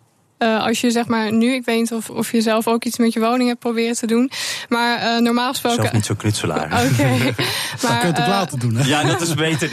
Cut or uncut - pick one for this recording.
cut